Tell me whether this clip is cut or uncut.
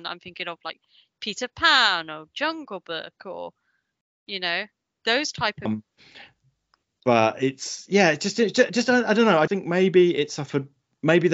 cut